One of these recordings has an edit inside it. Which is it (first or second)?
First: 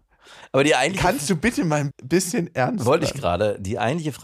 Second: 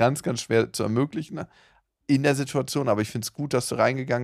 first